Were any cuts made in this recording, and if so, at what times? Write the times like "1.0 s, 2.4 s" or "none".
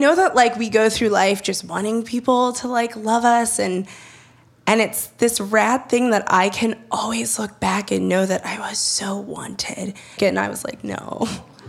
10.2 s